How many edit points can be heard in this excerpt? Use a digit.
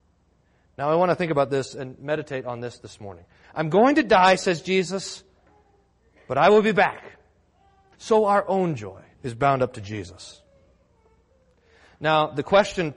3